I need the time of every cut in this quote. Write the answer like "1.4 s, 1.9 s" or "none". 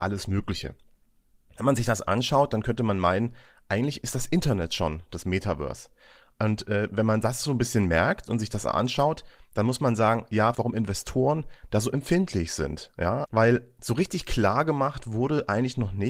10.5 s, 13.3 s